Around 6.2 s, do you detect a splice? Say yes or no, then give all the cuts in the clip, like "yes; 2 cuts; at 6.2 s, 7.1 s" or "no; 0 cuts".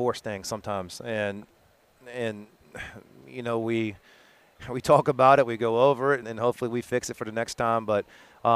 yes; 1 cut; at 6.2 s